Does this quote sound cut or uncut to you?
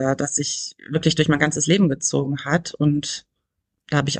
uncut